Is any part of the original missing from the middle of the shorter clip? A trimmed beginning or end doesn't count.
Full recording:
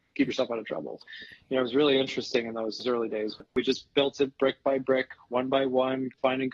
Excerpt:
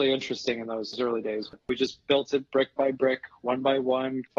no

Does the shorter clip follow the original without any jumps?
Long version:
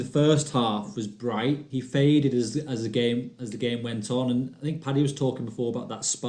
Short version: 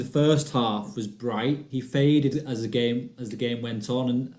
no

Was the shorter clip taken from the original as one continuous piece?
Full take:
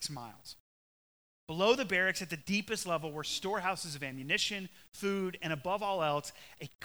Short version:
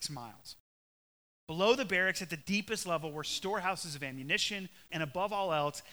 no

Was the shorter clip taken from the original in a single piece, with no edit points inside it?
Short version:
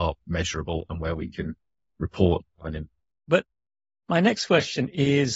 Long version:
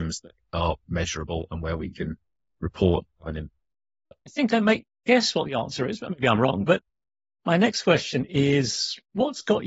no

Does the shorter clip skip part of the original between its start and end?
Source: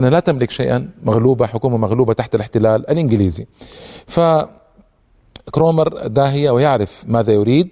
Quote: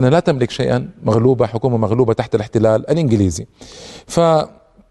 no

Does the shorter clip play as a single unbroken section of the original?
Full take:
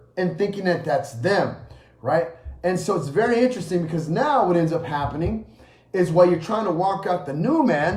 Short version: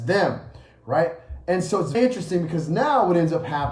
no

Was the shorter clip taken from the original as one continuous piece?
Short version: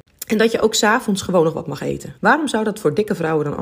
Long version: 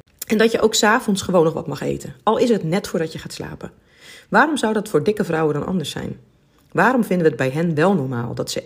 no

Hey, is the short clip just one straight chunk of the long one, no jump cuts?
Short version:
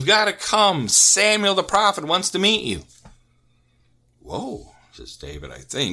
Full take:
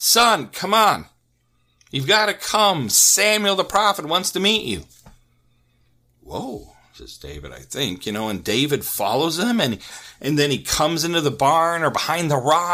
yes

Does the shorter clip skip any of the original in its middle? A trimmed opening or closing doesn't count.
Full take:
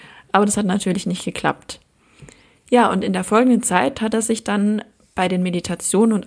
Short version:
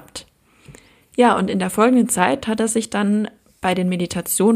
no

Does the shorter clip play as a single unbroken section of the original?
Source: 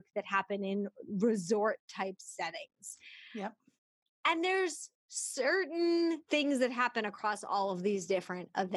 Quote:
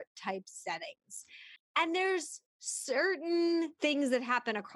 no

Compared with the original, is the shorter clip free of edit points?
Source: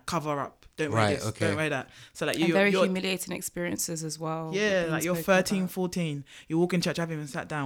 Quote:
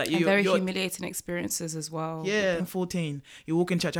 no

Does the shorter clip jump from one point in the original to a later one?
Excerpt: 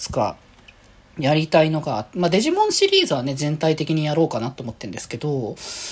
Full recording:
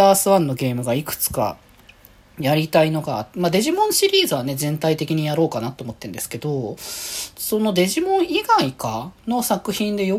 no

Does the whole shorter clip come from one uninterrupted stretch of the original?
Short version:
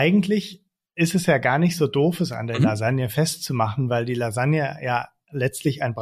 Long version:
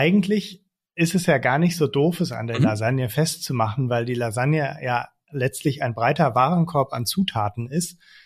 yes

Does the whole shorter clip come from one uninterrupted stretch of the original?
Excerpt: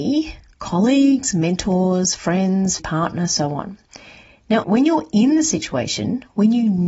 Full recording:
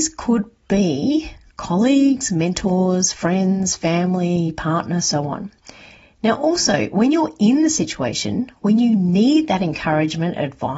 no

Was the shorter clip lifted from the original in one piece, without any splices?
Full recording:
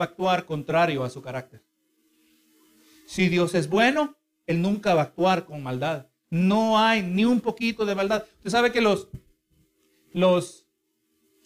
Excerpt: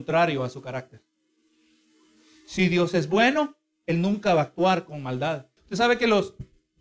no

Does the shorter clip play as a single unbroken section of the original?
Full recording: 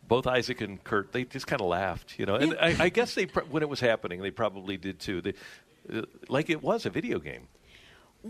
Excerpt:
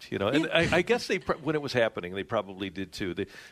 yes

